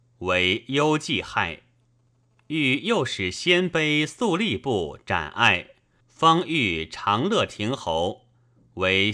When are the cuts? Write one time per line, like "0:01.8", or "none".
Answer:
0:06.0